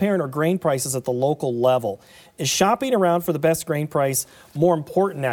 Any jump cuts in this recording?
no; 0 cuts

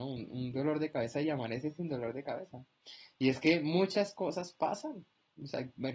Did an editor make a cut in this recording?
no; 0 cuts

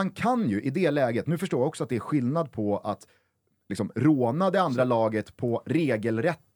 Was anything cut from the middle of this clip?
no; 0 cuts

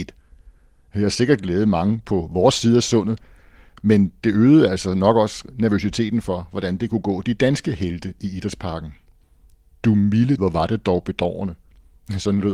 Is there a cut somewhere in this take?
yes; 1 cut; at 10.4 s

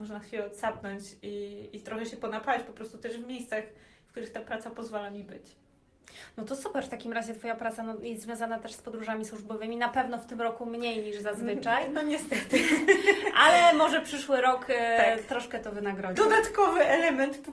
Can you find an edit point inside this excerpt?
yes; 1 cut; at 16.1 s

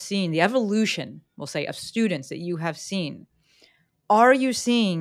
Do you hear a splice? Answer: no; 0 cuts

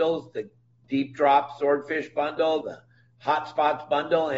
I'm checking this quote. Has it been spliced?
yes; 1 cut; at 2.6 s

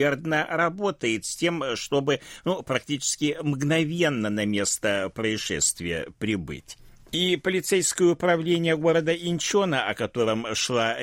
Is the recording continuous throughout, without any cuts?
yes; 0 cuts

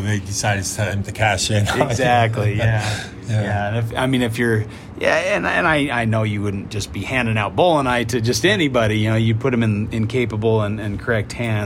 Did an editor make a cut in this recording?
no; 0 cuts

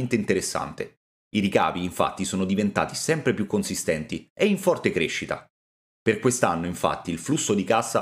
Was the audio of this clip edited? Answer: no; 0 cuts

